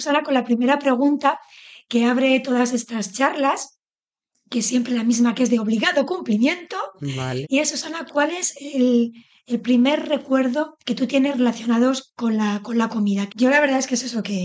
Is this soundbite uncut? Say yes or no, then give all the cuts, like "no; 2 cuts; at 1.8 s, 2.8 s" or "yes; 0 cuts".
no; 3 cuts; at 7.4 s, 10.8 s, 13.3 s